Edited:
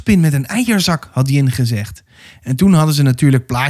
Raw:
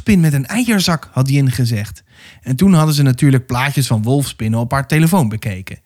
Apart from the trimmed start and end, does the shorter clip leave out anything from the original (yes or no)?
no